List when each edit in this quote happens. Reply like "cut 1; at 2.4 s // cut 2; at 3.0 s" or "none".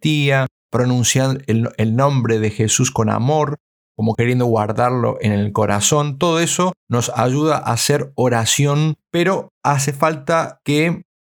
none